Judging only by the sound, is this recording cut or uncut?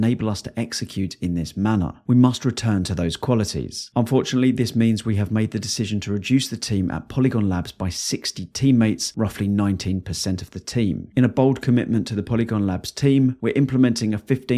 uncut